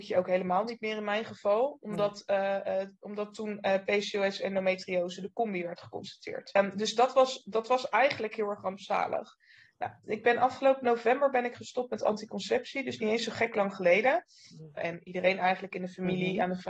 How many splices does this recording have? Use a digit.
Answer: 2